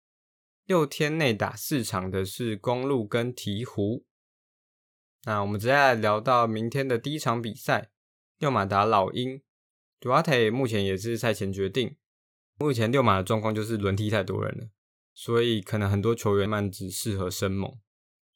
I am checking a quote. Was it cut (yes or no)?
yes